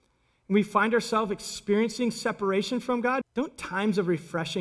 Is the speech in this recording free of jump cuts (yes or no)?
no